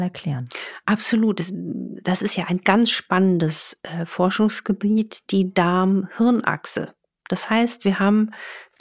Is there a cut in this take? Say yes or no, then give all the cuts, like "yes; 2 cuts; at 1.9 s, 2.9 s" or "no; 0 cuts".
no; 0 cuts